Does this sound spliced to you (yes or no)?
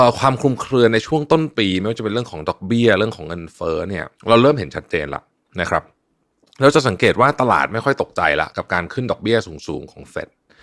yes